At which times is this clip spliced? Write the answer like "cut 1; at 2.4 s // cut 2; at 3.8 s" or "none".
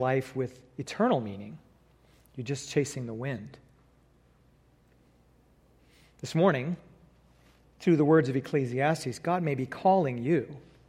none

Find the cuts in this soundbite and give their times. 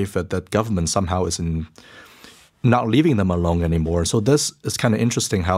none

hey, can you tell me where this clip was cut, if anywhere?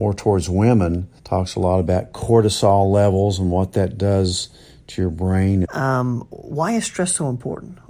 cut 1; at 1.2 s // cut 2; at 5.6 s

